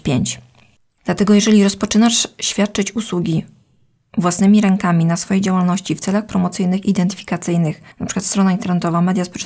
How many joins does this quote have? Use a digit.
1